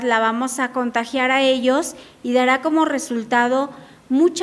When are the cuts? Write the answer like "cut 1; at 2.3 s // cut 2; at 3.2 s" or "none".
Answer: none